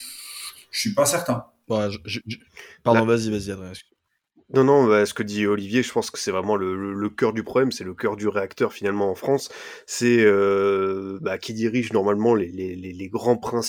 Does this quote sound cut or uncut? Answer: uncut